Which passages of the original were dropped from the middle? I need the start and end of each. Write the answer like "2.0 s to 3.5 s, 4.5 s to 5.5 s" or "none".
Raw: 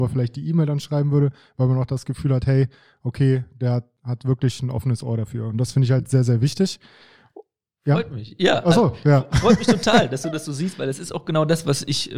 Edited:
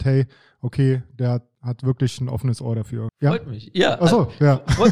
5.5 s to 7.7 s